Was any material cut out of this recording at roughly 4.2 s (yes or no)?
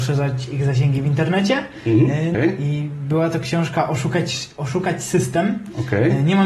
no